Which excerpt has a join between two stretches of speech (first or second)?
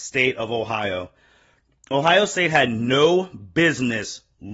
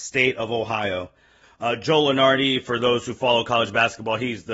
second